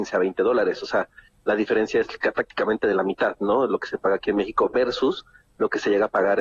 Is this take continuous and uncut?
yes; 0 cuts

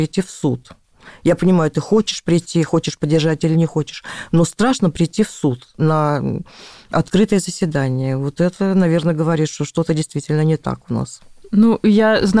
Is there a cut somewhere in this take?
no; 0 cuts

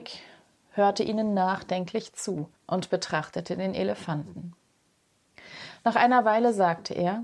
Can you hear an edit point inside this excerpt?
yes; 1 cut; at 2.6 s

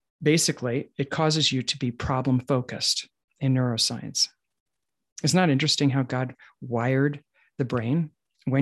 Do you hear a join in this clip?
no; 0 cuts

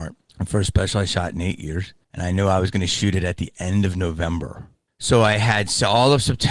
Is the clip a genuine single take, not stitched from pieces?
yes; 0 cuts

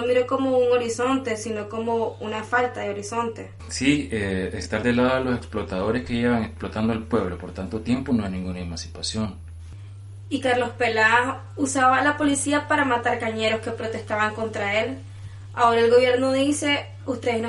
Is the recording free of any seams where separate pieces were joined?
yes; 0 cuts

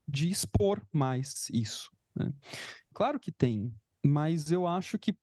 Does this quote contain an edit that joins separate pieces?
yes; 1 cut; at 2.9 s

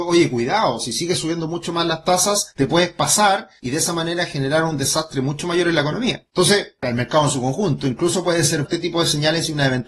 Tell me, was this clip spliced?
yes; 1 cut; at 8.6 s

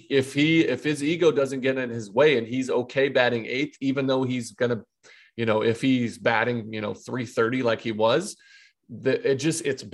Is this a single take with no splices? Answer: yes; 0 cuts

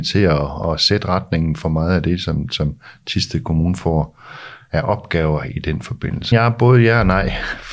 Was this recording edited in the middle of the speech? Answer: yes; 1 cut; at 6.3 s

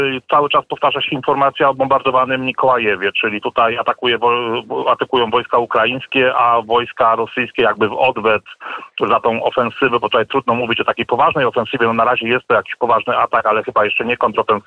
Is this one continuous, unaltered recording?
yes; 0 cuts

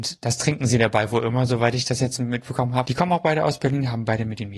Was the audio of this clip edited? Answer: yes; 1 cut; at 2.8 s

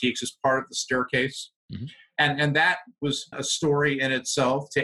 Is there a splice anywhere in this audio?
yes; 1 cut; at 3.3 s

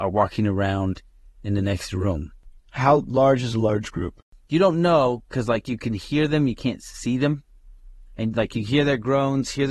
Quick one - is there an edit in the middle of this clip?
no; 0 cuts

